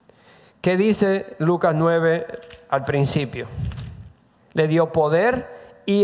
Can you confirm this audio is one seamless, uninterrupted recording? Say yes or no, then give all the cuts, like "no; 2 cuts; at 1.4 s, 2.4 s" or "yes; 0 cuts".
no; 1 cut; at 4.3 s